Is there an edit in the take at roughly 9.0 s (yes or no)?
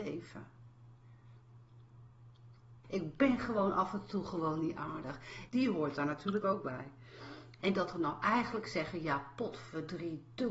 no